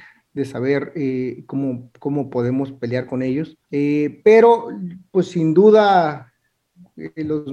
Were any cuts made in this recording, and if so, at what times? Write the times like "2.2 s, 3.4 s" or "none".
3.6 s

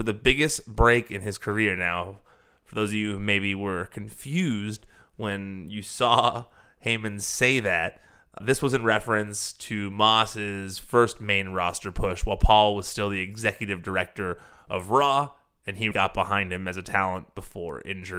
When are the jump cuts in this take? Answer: 8.4 s, 15.9 s

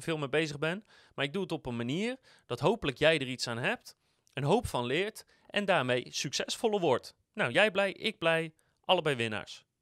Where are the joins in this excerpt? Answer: none

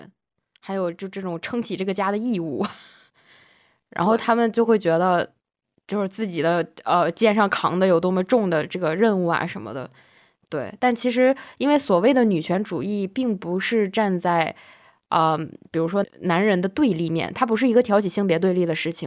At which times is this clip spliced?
16.0 s

